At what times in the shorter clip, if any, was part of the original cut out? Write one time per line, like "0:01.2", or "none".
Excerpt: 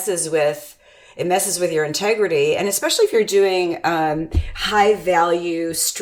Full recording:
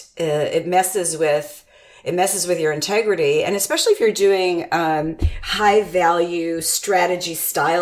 none